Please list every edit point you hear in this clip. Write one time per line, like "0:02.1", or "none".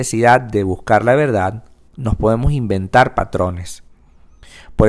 none